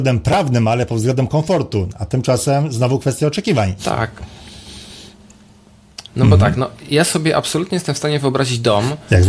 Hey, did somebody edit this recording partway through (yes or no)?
yes